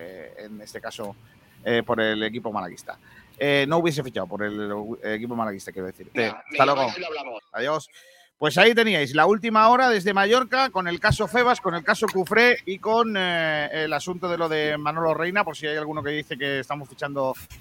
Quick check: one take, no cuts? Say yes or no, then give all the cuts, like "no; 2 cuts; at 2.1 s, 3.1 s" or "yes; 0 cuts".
no; 2 cuts; at 6.2 s, 7.4 s